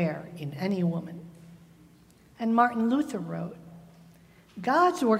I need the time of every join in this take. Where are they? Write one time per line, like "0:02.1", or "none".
none